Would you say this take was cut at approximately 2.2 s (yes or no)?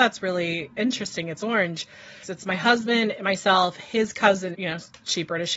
yes